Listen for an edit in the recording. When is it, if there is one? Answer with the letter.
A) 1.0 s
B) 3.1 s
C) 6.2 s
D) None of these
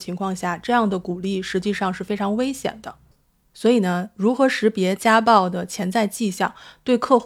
D